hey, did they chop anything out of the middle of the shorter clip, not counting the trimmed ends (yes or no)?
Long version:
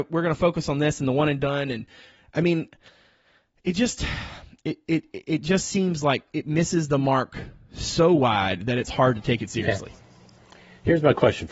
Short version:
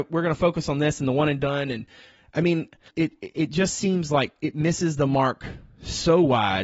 yes